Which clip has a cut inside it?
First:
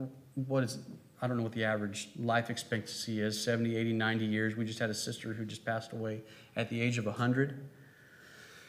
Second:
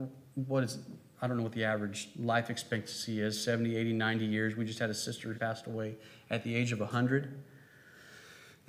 second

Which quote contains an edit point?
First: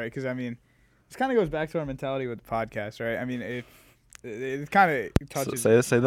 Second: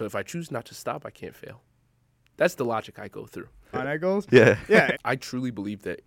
second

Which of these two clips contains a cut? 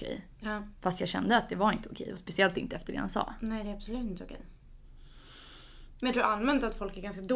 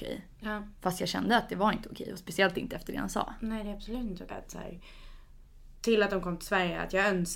second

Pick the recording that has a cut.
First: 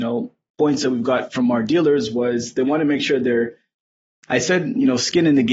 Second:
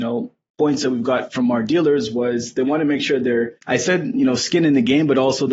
second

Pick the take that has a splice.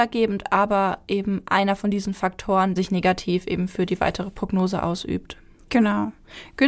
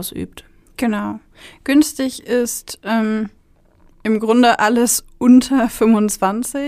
first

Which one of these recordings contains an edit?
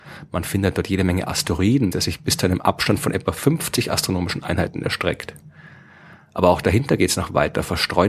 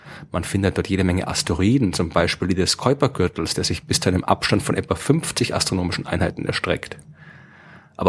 first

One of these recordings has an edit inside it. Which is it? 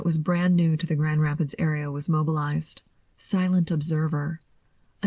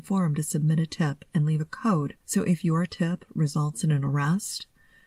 second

